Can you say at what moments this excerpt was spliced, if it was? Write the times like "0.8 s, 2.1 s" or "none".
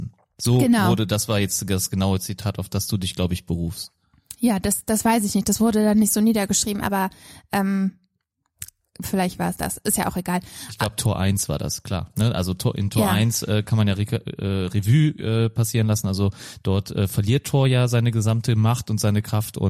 none